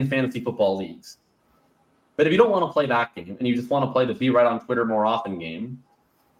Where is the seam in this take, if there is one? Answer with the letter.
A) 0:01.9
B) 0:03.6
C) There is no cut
C